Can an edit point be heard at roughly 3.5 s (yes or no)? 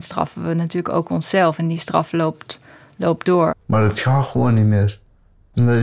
yes